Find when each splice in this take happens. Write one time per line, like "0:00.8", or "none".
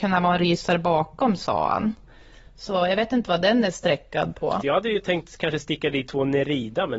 0:04.6

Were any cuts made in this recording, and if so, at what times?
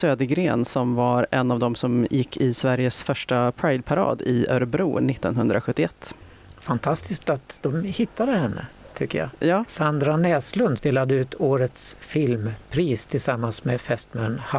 0:09.6
0:10.8

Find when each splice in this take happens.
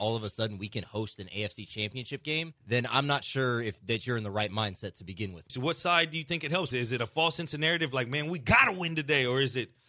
0:02.6
0:05.5
0:06.7

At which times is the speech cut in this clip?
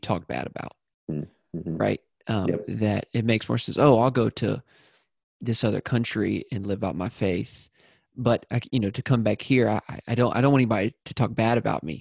none

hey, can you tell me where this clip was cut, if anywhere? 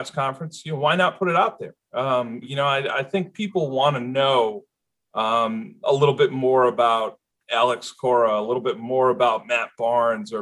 0:02.4

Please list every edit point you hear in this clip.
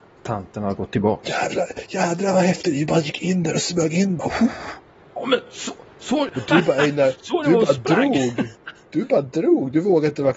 none

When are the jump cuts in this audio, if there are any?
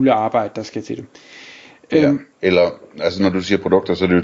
0:02.3

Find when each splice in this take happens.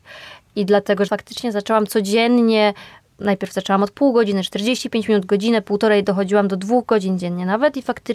0:01.1

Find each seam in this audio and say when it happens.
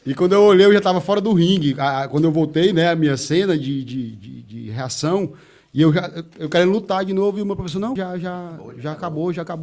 0:08.0

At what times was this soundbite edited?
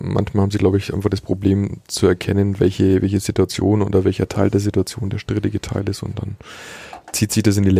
none

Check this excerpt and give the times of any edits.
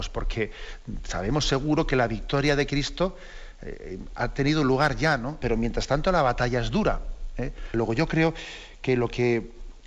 0:05.4
0:07.7

